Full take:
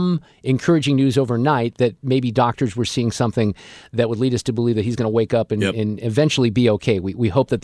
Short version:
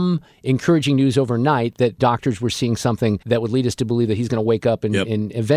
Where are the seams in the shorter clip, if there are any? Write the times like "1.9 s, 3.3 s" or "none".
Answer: 2.0 s, 3.2 s